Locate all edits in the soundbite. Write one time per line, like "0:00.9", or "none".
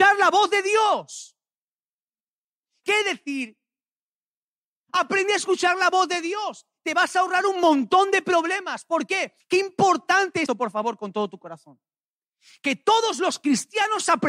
0:02.8
0:09.4
0:10.5